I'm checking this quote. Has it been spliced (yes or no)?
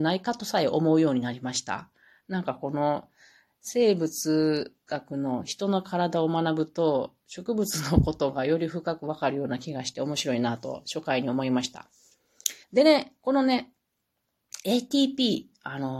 yes